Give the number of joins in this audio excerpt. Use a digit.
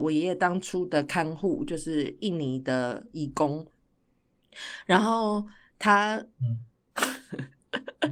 1